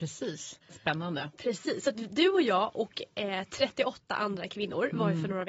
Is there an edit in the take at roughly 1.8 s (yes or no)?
no